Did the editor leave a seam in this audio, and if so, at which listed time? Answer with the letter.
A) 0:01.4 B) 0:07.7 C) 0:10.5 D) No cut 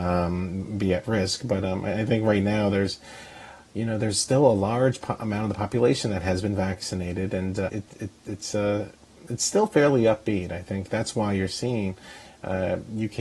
B